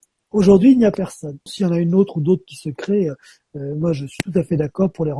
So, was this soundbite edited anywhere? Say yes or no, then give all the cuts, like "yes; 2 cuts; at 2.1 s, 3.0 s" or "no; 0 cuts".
yes; 1 cut; at 1.5 s